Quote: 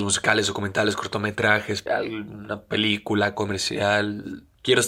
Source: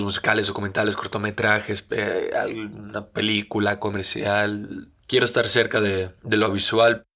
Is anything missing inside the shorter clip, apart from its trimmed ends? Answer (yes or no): yes